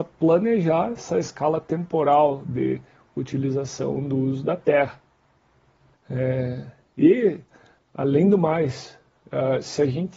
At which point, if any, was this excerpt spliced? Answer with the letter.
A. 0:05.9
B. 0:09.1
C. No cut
A